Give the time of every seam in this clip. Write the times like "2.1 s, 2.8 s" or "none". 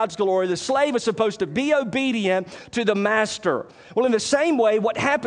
none